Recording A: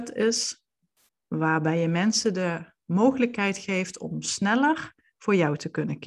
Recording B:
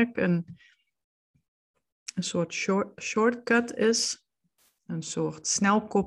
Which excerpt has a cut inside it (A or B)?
A